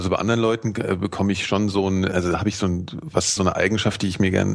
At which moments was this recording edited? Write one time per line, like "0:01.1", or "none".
0:02.1
0:03.4